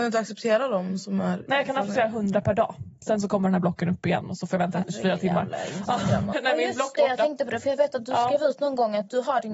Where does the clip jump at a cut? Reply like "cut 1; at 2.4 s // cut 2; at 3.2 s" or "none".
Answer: cut 1; at 6.3 s

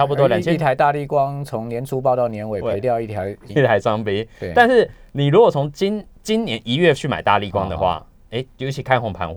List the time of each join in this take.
cut 1; at 3.5 s

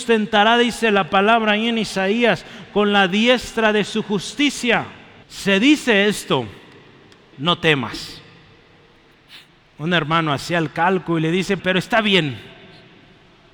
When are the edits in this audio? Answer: cut 1; at 5.2 s // cut 2; at 7.3 s // cut 3; at 11.6 s

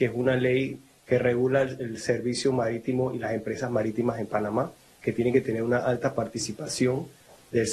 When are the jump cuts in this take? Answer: none

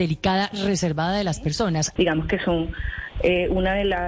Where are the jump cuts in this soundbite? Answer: cut 1; at 2.0 s

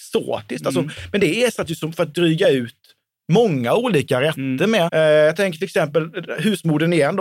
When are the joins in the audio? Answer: cut 1; at 4.9 s

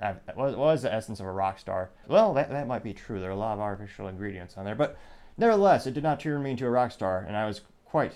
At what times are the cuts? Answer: cut 1; at 2.0 s

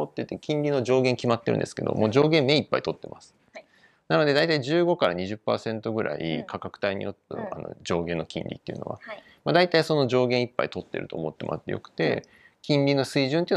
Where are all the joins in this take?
cut 1; at 3.5 s // cut 2; at 7.3 s

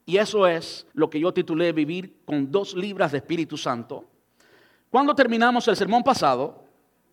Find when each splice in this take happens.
cut 1; at 0.9 s

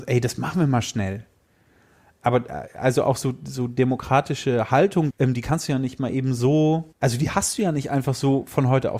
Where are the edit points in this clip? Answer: cut 1; at 5.1 s // cut 2; at 6.9 s

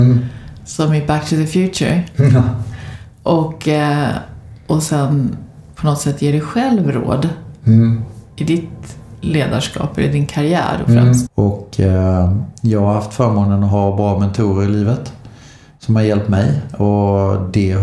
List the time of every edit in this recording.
cut 1; at 11.3 s

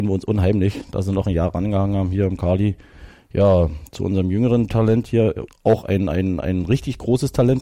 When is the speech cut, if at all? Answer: cut 1; at 5.5 s

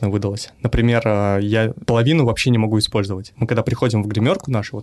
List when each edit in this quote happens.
none

